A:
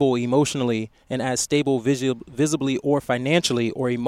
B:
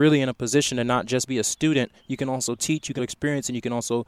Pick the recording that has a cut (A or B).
B